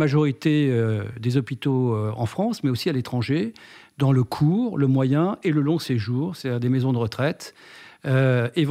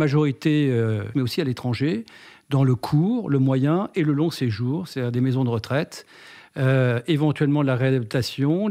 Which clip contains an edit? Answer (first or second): second